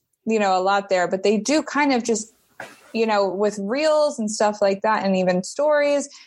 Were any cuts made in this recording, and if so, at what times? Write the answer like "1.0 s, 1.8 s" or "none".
none